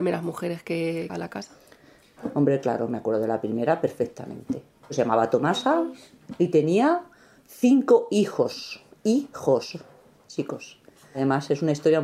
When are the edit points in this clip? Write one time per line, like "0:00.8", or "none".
0:01.1

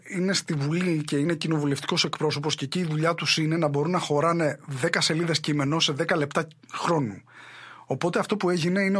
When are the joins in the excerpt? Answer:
none

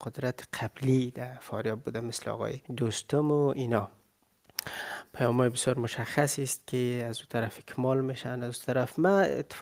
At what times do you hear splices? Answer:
0:02.7

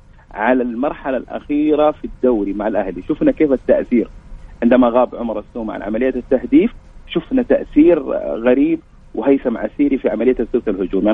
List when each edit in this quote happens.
none

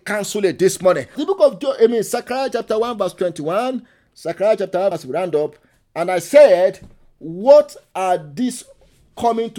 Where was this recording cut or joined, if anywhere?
0:01.1
0:04.9

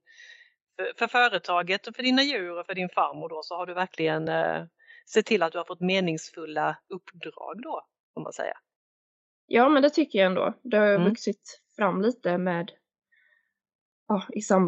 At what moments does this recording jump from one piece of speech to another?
none

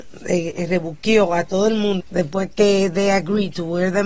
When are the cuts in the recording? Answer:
0:02.0

